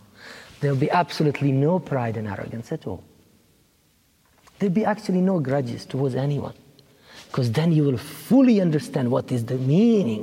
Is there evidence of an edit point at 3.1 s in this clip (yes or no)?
no